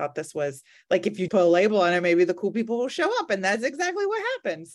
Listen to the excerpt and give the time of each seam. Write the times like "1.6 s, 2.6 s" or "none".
1.3 s